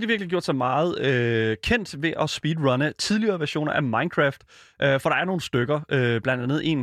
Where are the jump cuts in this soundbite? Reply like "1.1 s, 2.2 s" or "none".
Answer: none